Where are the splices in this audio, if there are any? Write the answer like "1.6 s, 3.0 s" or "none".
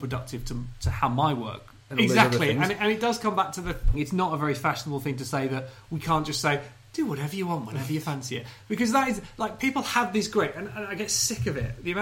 1.9 s, 3.9 s